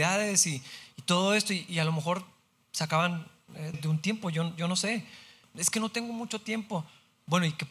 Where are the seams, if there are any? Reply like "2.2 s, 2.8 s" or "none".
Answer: 3.7 s, 5.4 s